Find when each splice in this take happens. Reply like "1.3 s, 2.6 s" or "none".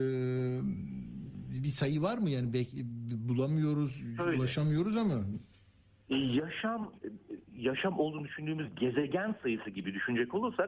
4.2 s